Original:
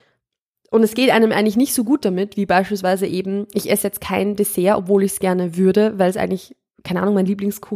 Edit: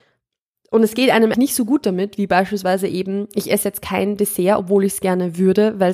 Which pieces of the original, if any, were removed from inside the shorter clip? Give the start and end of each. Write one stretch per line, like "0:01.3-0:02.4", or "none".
0:01.3-0:01.5